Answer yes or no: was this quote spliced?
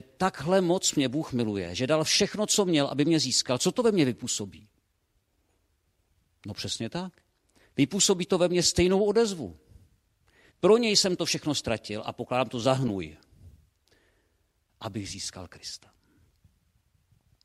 yes